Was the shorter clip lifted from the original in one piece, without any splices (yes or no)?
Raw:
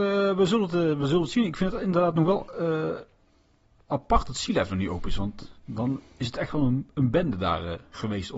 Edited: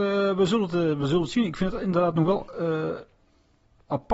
yes